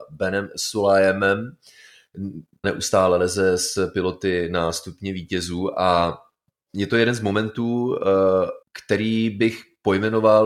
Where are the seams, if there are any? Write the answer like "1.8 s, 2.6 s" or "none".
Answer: 2.6 s, 8.6 s